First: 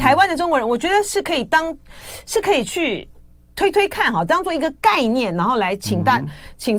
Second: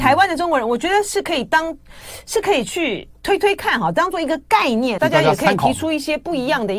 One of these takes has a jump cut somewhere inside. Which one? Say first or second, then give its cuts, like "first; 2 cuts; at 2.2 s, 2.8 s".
second; 2 cuts; at 3.2 s, 5.0 s